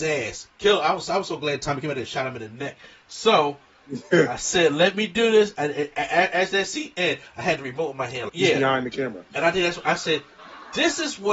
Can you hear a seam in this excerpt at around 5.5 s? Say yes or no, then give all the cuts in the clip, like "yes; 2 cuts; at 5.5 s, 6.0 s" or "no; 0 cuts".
no; 1 cut; at 8.3 s